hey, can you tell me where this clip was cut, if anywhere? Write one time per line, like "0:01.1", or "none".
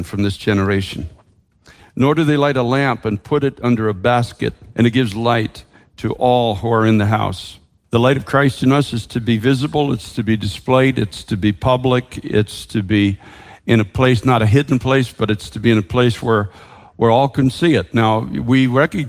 0:04.7